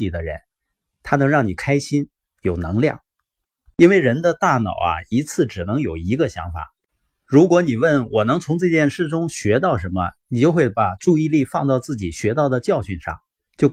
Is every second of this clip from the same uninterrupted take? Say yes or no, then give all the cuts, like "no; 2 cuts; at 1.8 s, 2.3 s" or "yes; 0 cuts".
no; 1 cut; at 3.4 s